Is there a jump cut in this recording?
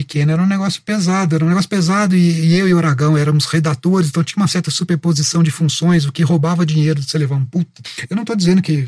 no; 0 cuts

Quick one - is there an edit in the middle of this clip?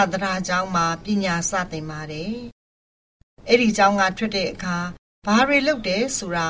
no; 0 cuts

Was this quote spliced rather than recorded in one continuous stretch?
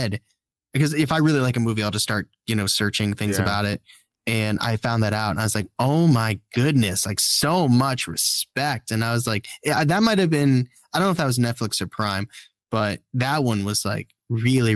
no; 0 cuts

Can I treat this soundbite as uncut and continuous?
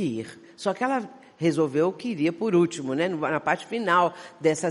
yes; 0 cuts

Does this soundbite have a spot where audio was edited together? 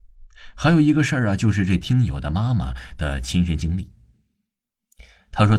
no; 0 cuts

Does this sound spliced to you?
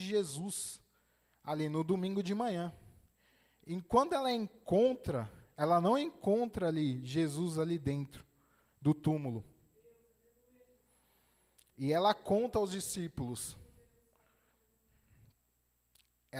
no; 0 cuts

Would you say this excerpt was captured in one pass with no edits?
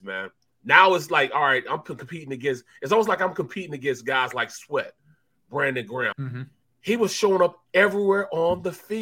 no; 1 cut; at 6.1 s

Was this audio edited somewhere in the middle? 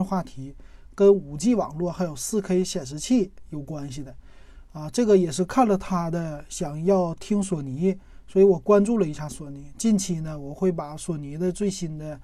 no; 0 cuts

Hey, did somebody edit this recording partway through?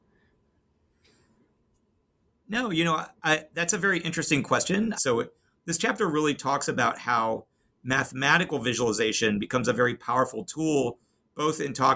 yes; 1 cut; at 4.9 s

